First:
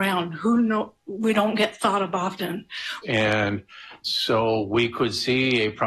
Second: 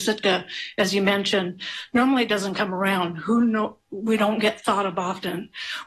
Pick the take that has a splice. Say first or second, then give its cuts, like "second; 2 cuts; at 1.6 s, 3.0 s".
first; 1 cut; at 3.0 s